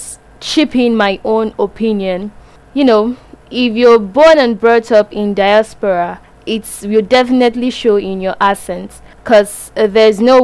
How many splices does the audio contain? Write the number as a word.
zero